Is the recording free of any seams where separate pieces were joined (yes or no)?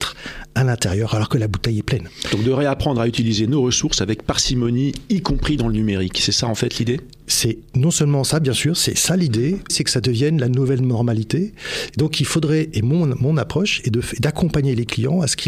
no